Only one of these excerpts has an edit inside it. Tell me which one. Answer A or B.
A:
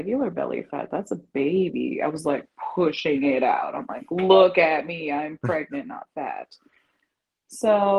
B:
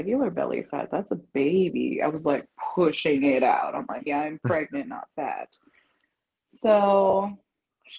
B